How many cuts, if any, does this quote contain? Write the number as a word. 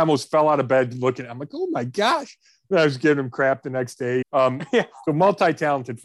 one